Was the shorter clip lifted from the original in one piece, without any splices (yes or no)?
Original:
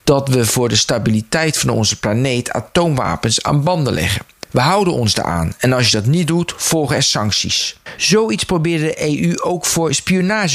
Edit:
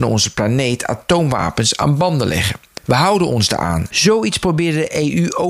no